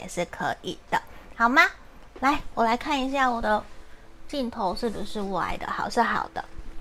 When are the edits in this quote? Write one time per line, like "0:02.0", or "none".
none